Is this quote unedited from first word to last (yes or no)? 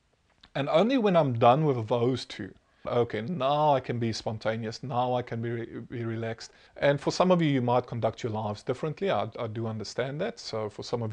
no